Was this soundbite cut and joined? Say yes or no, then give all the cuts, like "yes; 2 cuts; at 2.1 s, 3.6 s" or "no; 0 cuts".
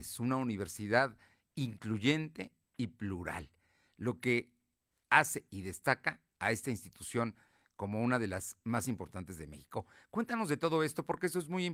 no; 0 cuts